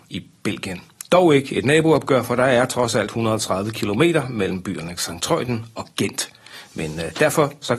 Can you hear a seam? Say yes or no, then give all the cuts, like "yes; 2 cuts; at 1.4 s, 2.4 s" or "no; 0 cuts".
no; 0 cuts